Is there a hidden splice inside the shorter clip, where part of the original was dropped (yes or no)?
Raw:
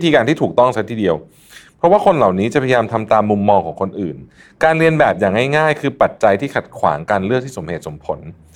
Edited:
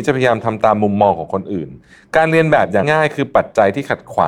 yes